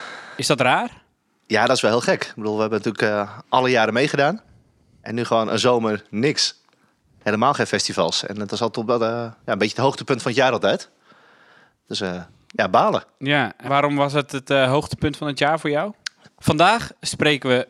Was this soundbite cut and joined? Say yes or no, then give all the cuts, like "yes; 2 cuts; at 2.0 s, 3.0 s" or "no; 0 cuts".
yes; 2 cuts; at 13.6 s, 16.3 s